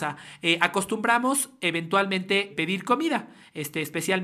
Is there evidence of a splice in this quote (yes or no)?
yes